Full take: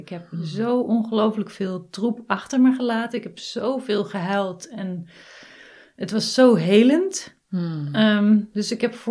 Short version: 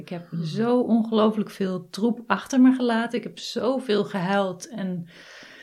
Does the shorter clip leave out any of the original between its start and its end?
no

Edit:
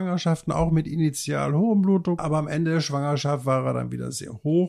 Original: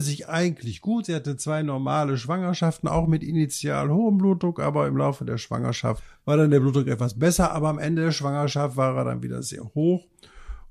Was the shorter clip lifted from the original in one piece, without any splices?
no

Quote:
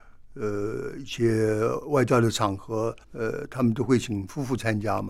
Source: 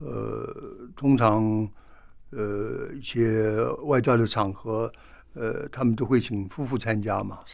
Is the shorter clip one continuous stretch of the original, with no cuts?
no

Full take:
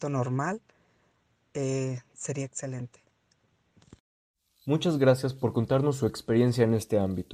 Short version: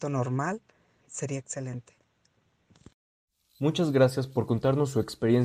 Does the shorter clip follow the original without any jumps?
no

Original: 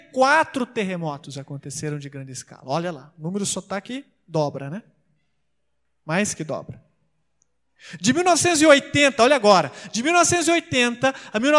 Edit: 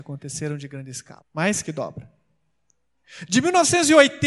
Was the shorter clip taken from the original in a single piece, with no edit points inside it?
no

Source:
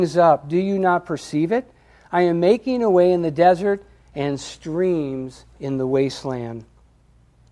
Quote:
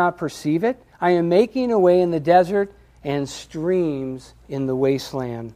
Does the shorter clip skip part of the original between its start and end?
yes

